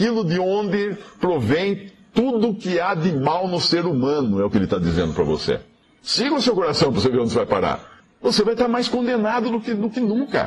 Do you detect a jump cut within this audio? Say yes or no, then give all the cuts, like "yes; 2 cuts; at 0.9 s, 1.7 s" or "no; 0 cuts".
no; 0 cuts